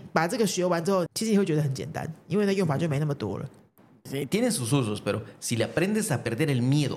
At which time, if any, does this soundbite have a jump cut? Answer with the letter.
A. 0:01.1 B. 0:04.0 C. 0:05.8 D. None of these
A